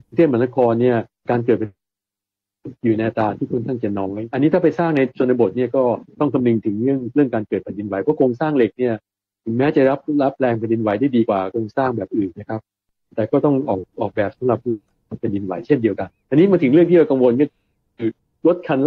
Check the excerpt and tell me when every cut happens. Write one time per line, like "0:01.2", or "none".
none